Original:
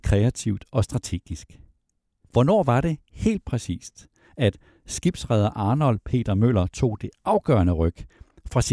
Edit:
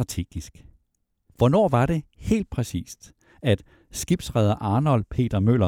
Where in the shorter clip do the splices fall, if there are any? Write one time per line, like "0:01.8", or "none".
none